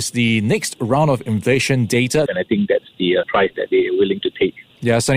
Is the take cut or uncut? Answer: cut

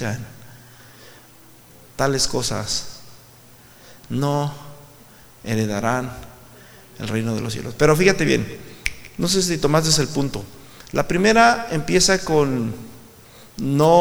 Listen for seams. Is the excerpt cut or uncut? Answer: uncut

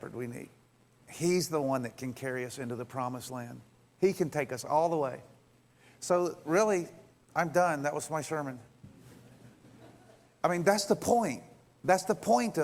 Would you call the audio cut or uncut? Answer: uncut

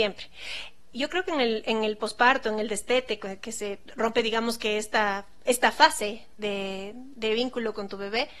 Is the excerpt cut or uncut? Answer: cut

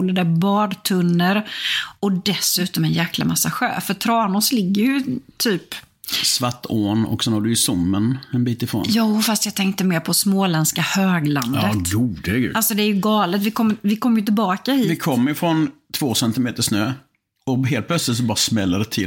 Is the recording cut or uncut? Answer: uncut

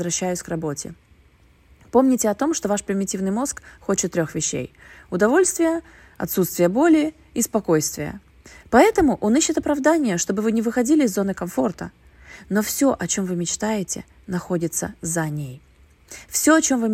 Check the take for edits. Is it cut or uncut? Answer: uncut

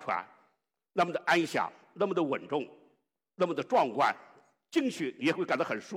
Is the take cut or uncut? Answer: uncut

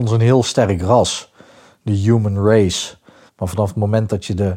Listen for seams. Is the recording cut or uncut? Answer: cut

